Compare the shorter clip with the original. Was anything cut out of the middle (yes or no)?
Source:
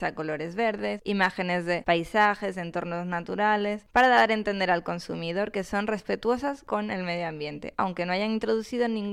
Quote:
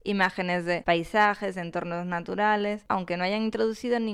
yes